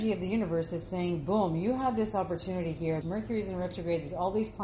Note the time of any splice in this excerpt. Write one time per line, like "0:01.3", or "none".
0:03.0